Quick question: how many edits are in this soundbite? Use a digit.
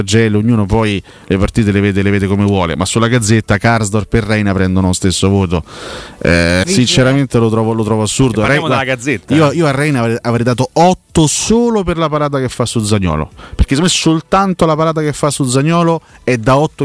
1